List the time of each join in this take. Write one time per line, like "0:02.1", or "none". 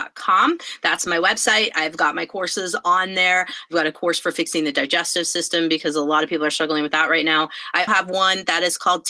0:07.9